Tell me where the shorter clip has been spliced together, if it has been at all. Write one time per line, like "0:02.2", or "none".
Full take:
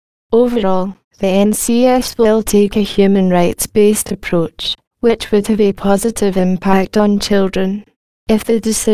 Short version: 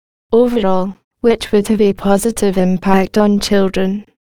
0:01.1

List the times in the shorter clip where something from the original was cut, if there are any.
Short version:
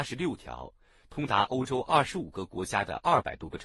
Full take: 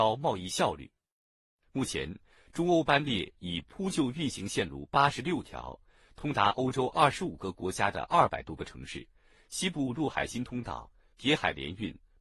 none

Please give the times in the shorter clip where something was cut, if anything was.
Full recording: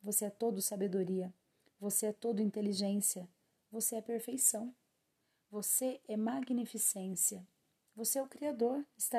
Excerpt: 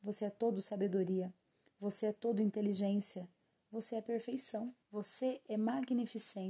0:04.8

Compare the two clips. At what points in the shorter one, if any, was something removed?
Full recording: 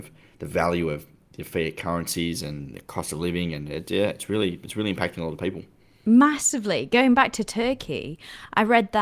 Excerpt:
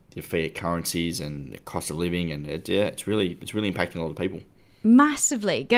none

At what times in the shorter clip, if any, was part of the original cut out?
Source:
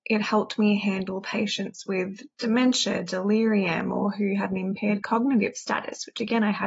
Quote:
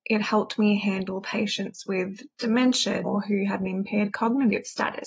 0:03.0

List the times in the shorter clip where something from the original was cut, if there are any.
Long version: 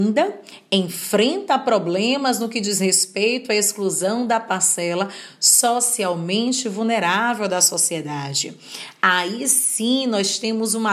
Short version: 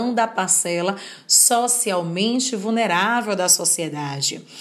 none

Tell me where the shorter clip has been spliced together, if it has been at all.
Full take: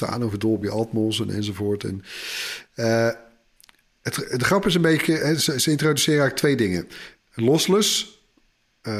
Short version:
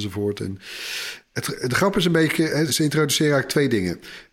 0:01.2
0:02.7

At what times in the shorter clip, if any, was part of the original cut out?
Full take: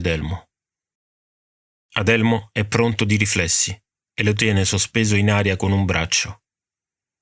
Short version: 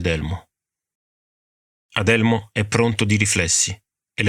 none

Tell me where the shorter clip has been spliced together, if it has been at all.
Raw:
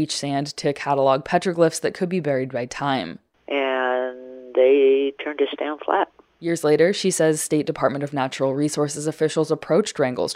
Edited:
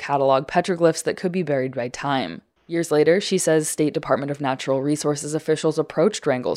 0:02.6

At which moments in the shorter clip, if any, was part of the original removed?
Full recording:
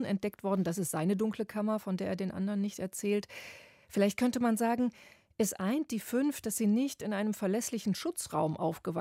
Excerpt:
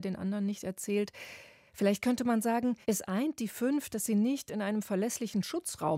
0:02.8

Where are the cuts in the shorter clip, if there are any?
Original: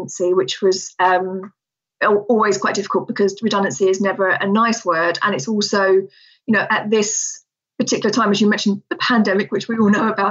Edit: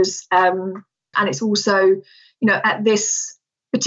0:01.1

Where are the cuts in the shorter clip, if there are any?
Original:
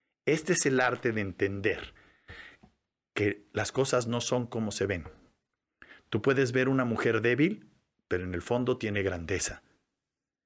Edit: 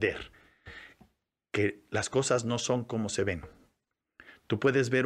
none

